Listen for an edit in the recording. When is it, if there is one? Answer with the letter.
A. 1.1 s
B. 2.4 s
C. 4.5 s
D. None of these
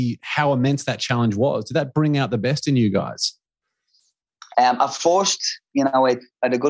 C